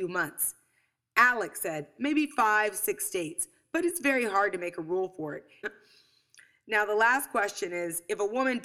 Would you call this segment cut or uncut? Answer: cut